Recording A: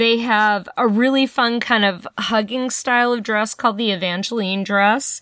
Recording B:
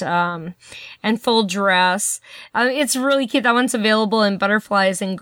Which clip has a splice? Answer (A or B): B